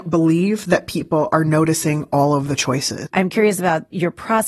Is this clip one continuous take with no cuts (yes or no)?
no